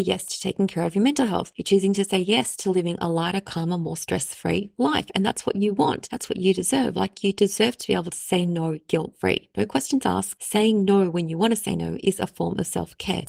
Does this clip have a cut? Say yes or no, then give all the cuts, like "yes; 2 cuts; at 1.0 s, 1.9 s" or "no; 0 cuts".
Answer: no; 0 cuts